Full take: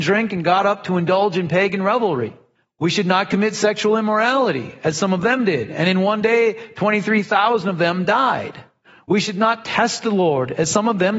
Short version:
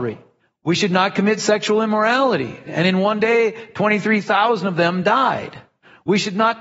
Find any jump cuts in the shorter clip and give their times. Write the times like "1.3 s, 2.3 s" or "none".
2.7 s